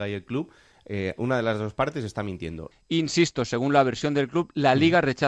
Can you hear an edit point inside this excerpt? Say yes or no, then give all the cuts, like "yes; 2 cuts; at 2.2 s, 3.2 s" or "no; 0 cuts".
yes; 1 cut; at 2.7 s